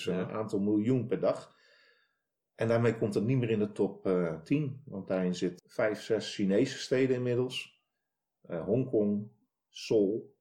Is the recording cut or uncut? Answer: uncut